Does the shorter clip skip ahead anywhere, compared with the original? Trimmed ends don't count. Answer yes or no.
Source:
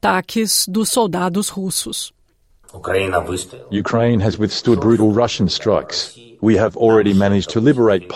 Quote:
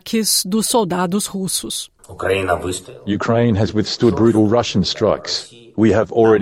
yes